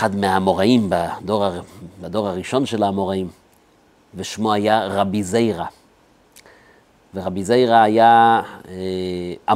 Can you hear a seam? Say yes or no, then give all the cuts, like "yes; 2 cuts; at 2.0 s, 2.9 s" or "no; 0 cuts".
no; 0 cuts